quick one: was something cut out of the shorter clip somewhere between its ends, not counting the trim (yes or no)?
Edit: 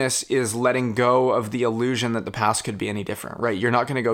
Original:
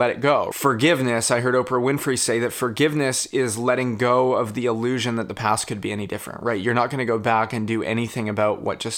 no